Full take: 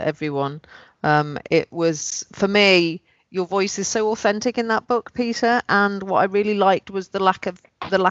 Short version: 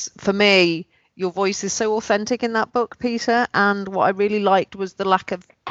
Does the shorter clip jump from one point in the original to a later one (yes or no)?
no